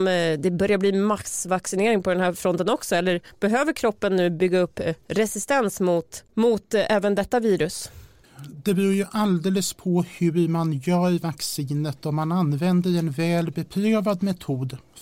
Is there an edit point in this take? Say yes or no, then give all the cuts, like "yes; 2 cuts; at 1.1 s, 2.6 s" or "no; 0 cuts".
no; 0 cuts